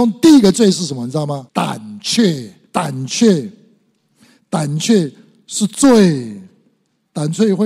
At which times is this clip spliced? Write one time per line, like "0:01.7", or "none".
0:01.5
0:02.7